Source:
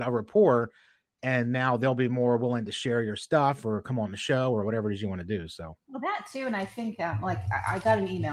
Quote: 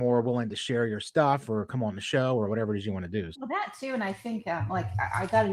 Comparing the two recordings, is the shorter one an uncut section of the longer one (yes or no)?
no